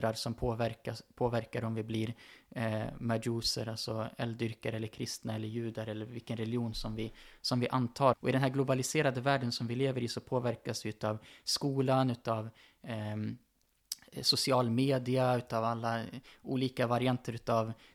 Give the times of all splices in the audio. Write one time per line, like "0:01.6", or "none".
0:08.1